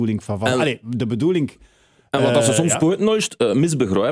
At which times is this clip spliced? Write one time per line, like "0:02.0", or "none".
none